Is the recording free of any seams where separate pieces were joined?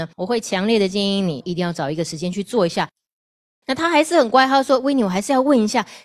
no; 1 cut; at 3.6 s

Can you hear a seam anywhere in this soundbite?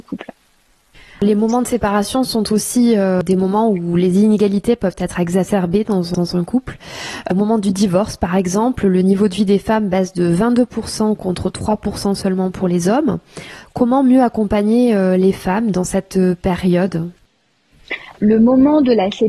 no; 0 cuts

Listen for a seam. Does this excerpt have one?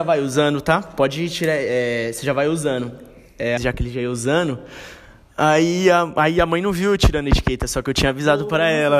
yes; 1 cut; at 3.6 s

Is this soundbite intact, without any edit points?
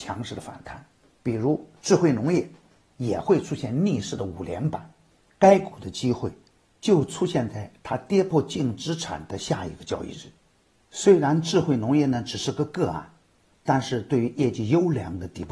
no; 1 cut; at 2.8 s

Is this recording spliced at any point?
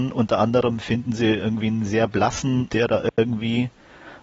yes; 1 cut; at 2.7 s

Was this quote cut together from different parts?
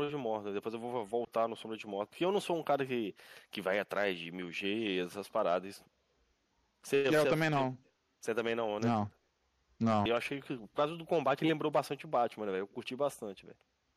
yes; 1 cut; at 10.1 s

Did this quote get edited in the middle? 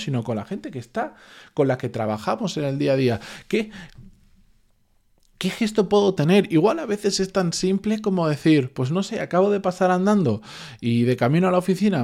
no; 0 cuts

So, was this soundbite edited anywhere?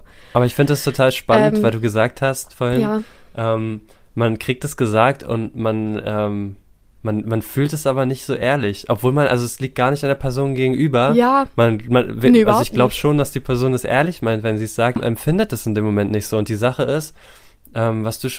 yes; 1 cut; at 15.0 s

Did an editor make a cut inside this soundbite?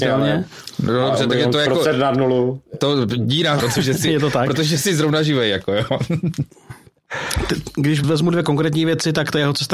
yes; 2 cuts; at 3.6 s, 8.0 s

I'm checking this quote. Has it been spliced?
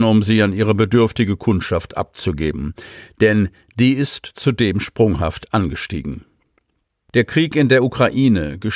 no; 0 cuts

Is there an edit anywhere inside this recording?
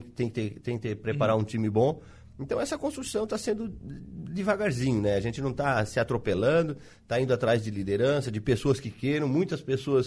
no; 0 cuts

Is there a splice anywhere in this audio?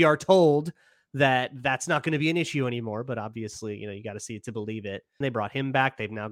yes; 1 cut; at 5.2 s

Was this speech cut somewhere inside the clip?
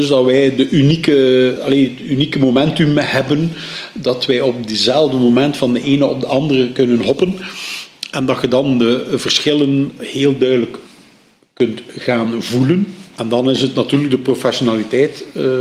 yes; 2 cuts; at 1.6 s, 10.0 s

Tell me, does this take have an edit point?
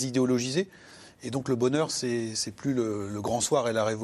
no; 0 cuts

